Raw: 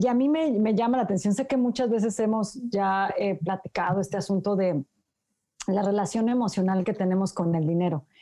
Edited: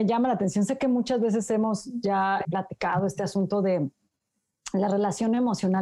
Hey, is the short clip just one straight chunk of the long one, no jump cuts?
no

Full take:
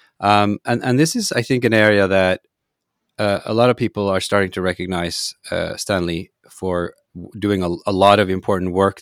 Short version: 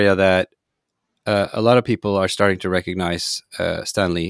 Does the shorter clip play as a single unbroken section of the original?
yes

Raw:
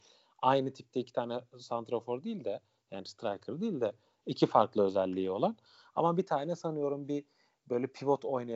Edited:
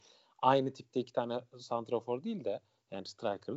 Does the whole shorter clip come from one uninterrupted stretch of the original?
yes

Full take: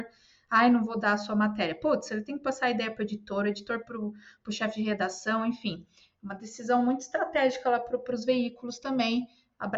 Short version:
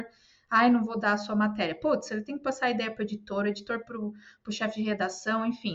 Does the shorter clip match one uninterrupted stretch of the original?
yes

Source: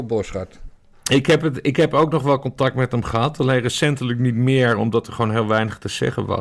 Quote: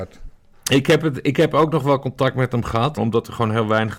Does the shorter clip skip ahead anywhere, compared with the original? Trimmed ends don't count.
yes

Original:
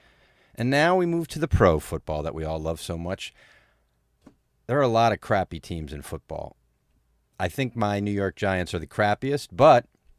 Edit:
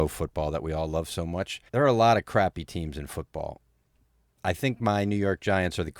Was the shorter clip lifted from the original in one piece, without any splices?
no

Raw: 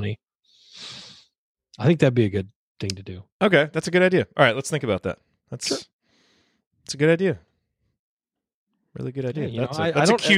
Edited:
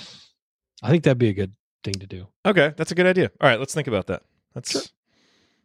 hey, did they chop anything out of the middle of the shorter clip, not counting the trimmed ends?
no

